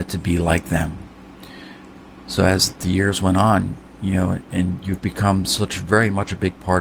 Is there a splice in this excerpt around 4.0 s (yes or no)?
no